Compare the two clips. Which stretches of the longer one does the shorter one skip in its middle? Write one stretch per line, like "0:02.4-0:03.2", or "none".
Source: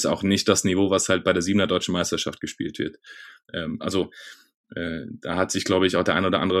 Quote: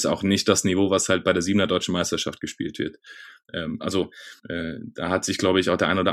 0:04.4-0:04.6